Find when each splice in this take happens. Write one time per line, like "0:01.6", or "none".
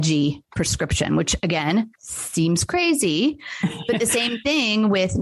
0:02.0